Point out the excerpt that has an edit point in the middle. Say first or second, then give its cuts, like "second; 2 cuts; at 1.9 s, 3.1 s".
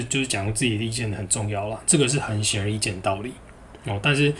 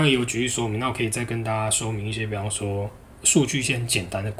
first; 1 cut; at 1.9 s